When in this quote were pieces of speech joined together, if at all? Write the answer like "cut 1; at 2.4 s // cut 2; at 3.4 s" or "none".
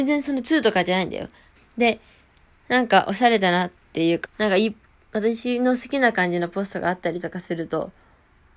cut 1; at 1.6 s // cut 2; at 4.3 s